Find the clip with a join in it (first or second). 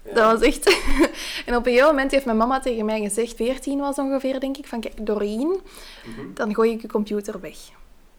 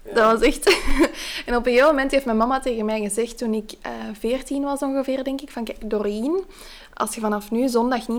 first